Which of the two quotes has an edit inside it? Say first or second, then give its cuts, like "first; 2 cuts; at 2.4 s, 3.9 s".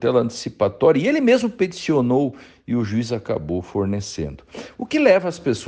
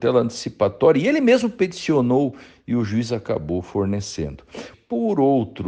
second; 1 cut; at 4.7 s